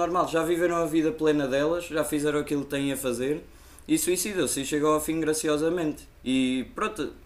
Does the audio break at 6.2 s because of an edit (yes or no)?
yes